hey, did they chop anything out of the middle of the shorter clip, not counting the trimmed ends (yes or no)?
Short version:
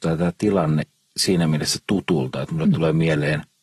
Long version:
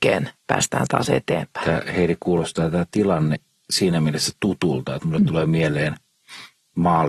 no